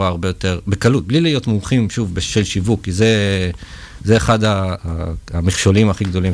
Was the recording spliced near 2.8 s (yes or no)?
no